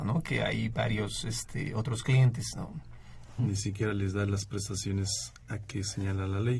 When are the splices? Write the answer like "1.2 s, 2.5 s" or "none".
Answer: 3.4 s